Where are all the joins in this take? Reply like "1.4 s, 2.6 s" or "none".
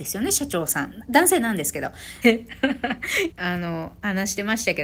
2.2 s, 3.3 s